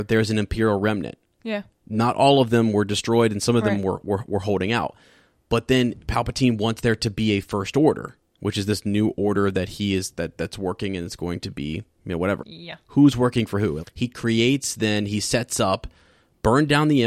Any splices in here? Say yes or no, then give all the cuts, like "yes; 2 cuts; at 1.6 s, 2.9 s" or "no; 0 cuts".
yes; 2 cuts; at 12.4 s, 13.8 s